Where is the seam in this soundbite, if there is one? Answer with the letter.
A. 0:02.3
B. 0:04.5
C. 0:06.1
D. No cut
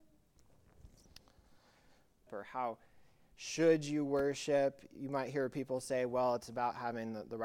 A